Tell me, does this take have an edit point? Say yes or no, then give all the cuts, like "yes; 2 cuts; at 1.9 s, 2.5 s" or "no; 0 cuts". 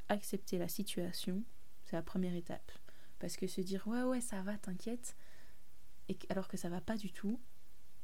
no; 0 cuts